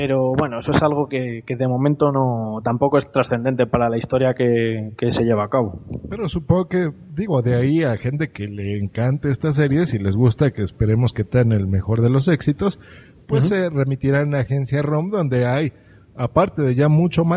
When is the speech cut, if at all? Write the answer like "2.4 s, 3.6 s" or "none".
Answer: none